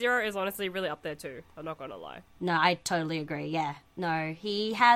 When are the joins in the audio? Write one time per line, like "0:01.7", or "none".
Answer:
none